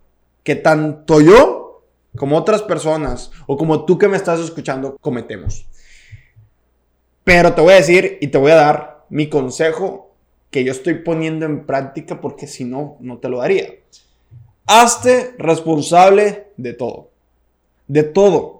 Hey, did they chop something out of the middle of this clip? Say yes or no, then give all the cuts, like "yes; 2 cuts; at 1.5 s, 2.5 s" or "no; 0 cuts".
yes; 1 cut; at 5.0 s